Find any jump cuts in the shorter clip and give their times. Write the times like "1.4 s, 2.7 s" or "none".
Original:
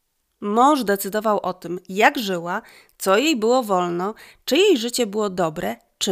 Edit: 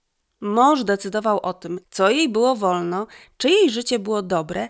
1.8 s